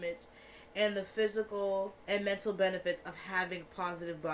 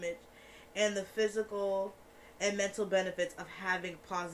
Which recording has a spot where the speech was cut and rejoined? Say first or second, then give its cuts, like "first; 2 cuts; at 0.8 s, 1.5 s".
first; 1 cut; at 2.0 s